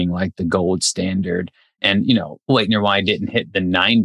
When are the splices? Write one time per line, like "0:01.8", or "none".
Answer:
none